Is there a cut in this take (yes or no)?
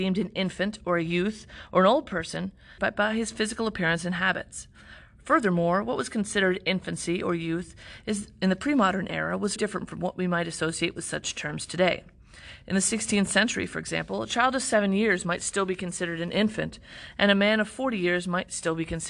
yes